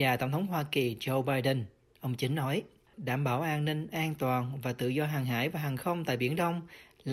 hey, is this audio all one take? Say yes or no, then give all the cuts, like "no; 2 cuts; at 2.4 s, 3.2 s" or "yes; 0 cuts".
no; 1 cut; at 2.9 s